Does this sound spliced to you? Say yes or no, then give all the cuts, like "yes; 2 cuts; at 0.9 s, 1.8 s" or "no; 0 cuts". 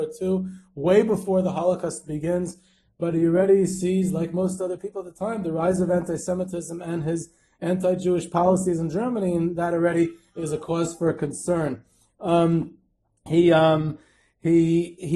no; 0 cuts